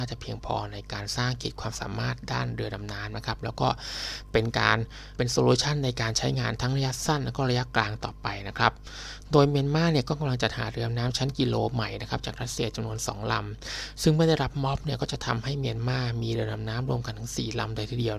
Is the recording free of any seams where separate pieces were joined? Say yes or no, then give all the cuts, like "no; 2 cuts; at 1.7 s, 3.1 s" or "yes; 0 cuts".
no; 1 cut; at 5.2 s